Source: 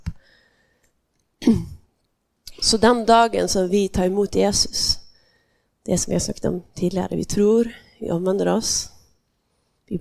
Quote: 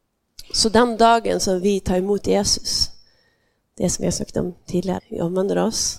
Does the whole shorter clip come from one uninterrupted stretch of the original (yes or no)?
no